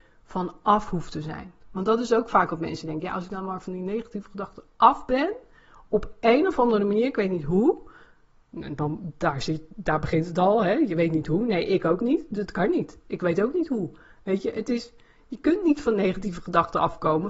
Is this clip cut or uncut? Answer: uncut